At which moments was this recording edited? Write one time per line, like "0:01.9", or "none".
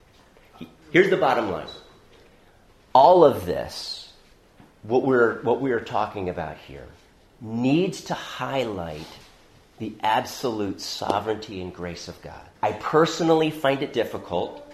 0:12.6

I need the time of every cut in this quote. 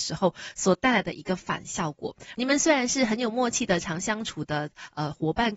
0:02.4

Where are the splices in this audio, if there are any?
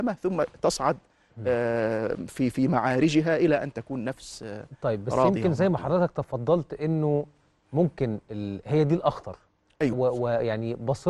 0:09.9

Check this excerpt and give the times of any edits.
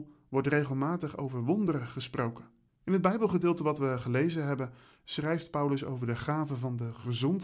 0:02.7

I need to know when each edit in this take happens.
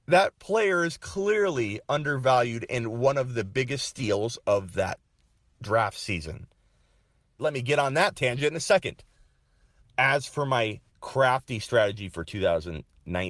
0:07.4
0:09.8
0:10.9

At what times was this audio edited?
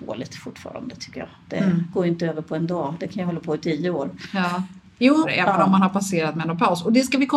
0:05.2

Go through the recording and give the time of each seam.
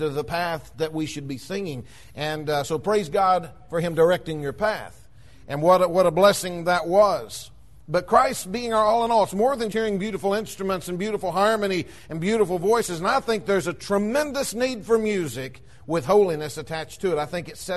0:09.7

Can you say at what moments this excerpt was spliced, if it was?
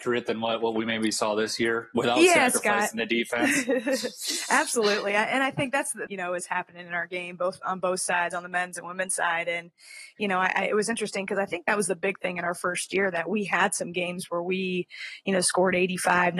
0:06.1

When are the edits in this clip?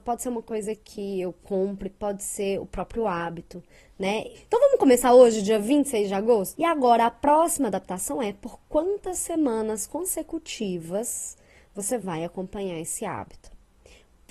0:04.4
0:06.5

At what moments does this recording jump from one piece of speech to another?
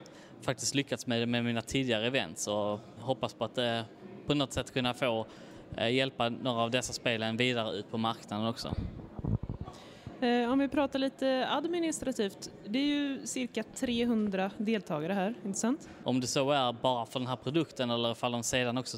0:16.0

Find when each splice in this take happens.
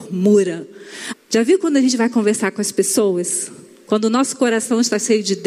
0:01.1

